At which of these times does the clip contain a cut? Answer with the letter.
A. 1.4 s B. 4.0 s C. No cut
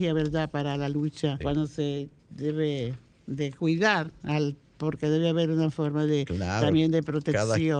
A